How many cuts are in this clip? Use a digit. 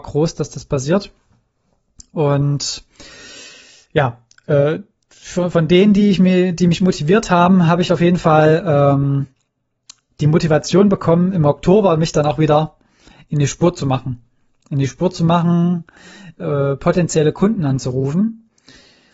0